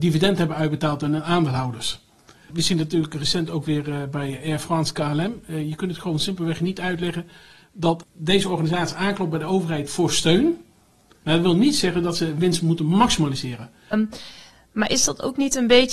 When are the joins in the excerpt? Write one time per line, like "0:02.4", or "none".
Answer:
0:11.2
0:13.9